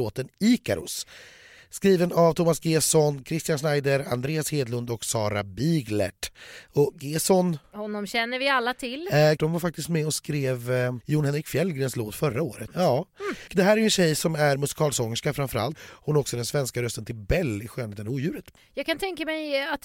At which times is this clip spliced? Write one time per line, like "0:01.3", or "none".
0:09.4
0:12.7
0:15.7